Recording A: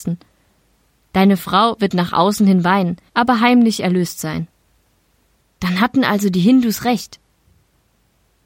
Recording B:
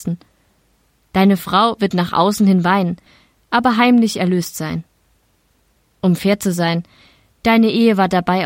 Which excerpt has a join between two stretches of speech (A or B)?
A